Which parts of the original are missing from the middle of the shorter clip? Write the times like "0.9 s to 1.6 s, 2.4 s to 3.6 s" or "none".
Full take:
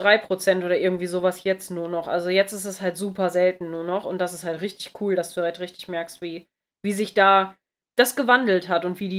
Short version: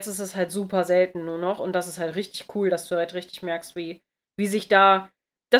none